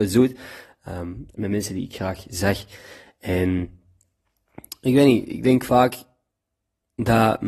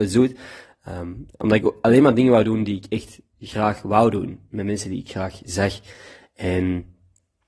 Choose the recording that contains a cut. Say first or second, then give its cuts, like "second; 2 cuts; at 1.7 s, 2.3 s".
first; 1 cut; at 1.3 s